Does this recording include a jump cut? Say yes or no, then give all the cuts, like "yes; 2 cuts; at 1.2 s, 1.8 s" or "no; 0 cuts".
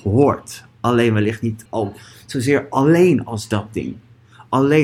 yes; 1 cut; at 1.7 s